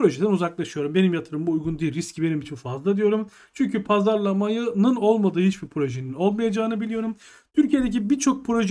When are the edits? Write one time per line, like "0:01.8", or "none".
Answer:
none